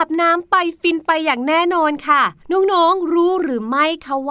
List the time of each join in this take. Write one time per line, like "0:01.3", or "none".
0:02.4